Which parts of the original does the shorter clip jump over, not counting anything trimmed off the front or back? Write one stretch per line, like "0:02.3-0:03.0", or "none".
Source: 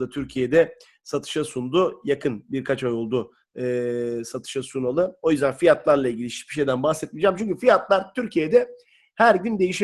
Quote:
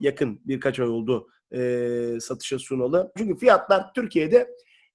0:05.2-0:07.4